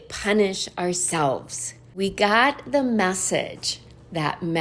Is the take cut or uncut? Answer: uncut